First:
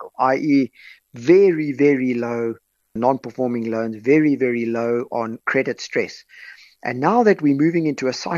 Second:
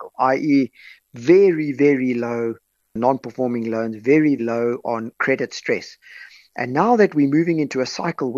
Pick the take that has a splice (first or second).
second